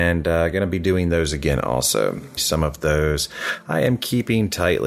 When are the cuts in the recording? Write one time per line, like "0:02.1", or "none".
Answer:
0:02.4